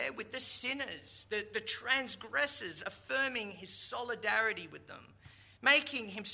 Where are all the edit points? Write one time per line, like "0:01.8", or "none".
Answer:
none